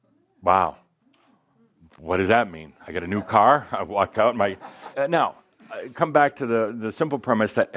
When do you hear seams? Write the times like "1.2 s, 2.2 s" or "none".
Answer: 4.9 s

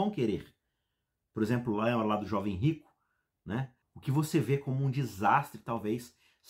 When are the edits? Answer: 3.8 s

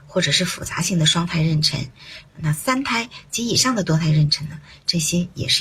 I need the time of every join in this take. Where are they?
2.2 s

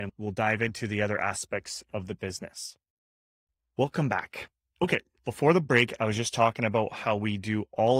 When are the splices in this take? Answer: none

